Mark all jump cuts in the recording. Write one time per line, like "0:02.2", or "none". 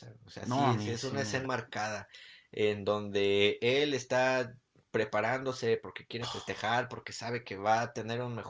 0:01.4

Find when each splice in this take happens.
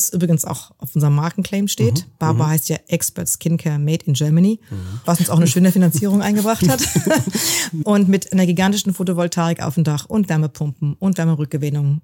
0:05.0
0:07.8

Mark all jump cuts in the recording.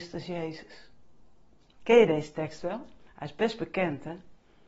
none

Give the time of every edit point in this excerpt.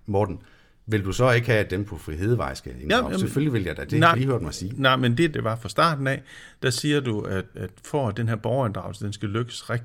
0:04.1
0:05.3
0:07.5

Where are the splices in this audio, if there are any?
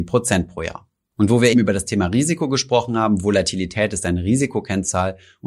0:01.5

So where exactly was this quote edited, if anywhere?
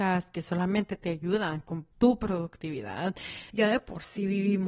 0:01.9
0:03.5

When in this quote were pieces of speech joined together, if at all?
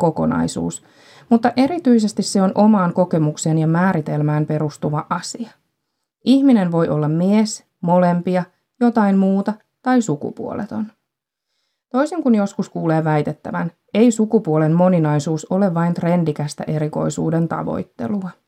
0:07.7

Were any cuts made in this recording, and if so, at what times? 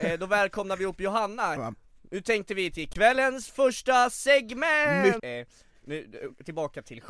0:01.6
0:05.2

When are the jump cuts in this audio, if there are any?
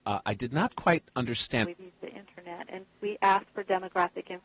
0:01.6
0:02.9

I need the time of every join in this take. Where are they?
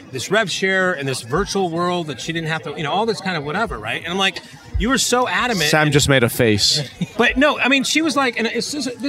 0:07.1

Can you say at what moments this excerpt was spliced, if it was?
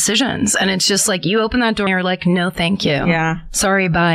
0:01.9

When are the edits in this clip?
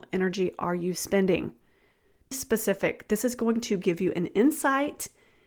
0:02.3

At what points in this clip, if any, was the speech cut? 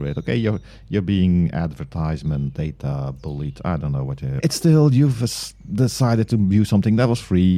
0:04.4

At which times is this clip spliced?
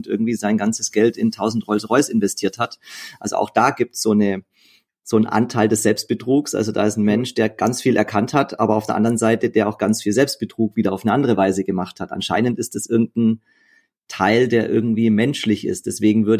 none

